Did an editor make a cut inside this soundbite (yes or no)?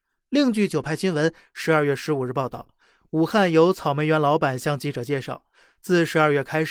no